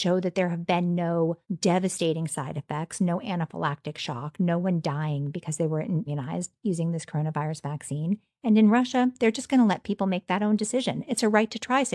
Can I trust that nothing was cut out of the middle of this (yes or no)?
no